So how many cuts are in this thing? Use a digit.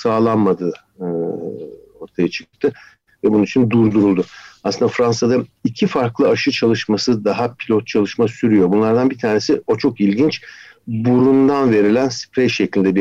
0